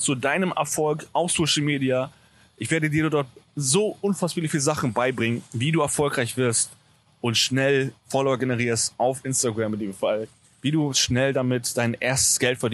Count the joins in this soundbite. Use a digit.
0